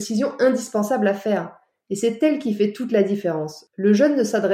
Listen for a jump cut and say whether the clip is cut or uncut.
uncut